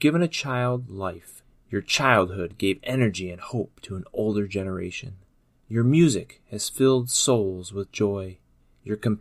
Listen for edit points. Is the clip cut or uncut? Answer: cut